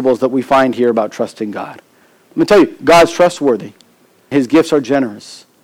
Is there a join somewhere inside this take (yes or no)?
yes